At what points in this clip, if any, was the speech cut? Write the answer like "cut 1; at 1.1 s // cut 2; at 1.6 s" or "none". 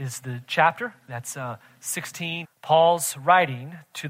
cut 1; at 2.4 s